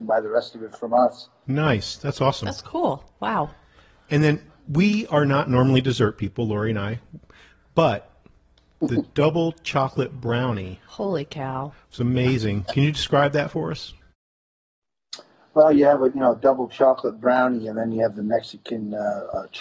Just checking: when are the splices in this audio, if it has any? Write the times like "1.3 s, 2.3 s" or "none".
none

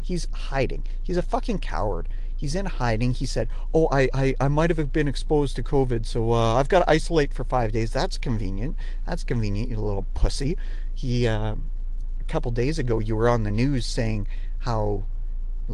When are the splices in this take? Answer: none

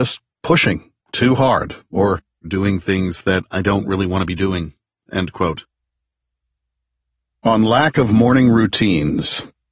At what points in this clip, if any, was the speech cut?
none

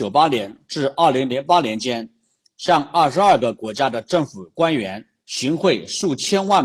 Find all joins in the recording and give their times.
none

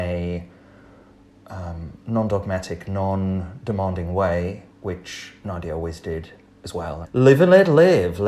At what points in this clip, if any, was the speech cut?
4.7 s, 7.0 s

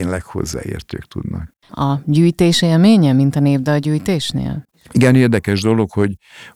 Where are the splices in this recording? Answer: 1.7 s

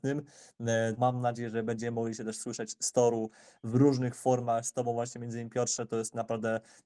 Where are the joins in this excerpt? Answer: 1.0 s

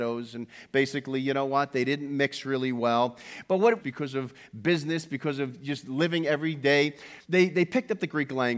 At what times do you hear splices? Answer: 3.8 s, 7.2 s

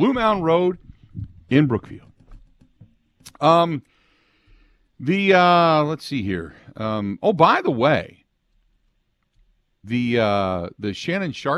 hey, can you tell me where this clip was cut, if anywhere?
9.8 s

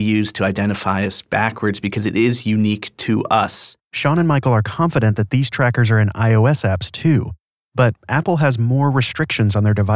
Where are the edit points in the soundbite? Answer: 3.8 s

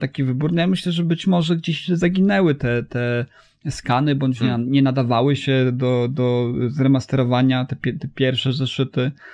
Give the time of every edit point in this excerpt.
none

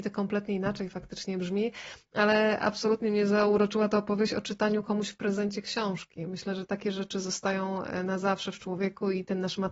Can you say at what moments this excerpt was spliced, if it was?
none

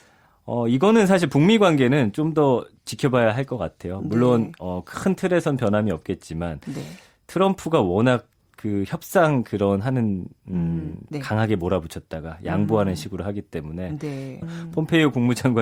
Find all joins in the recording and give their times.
11.1 s, 14.4 s

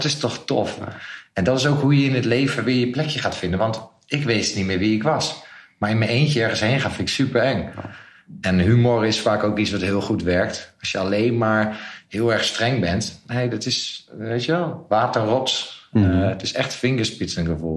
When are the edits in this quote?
7.7 s

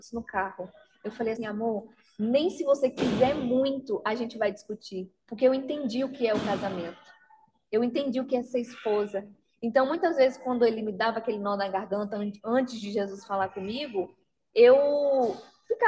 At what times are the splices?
1.4 s

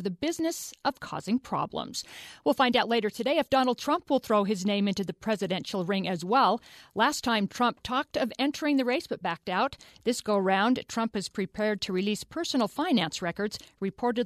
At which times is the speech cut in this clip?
none

